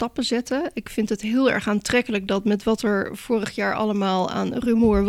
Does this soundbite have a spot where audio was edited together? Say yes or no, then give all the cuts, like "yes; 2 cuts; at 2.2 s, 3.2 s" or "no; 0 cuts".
no; 0 cuts